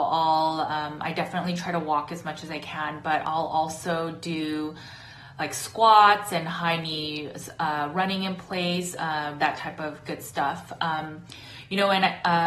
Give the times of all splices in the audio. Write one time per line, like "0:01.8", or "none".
0:09.4